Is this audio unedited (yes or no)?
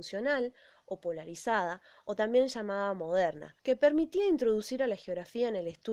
no